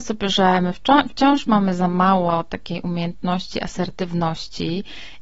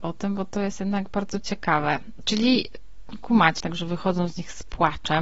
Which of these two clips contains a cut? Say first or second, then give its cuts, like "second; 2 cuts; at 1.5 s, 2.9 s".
second; 2 cuts; at 2.2 s, 3.6 s